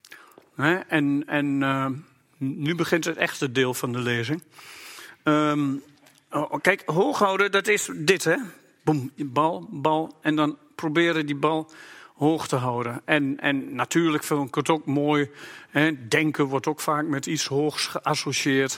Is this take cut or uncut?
uncut